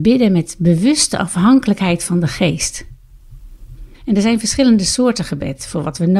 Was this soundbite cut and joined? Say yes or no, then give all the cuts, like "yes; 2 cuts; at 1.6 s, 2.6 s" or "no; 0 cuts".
yes; 1 cut; at 3.9 s